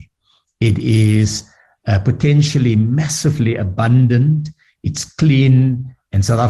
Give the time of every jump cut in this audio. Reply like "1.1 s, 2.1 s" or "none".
none